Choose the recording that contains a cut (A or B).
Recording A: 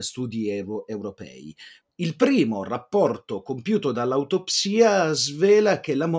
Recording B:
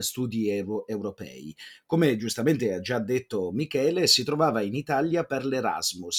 A